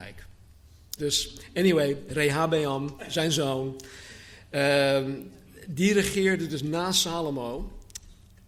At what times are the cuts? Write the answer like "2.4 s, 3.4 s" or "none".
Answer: 1.0 s

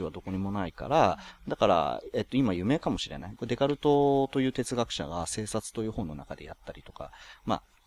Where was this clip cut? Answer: 3.3 s

